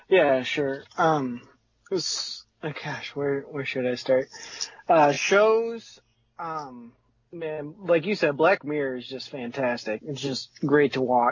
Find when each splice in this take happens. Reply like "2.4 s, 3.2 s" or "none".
none